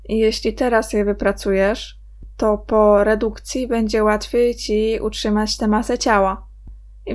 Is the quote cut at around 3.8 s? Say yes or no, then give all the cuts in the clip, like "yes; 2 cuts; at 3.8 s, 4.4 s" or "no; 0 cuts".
no; 0 cuts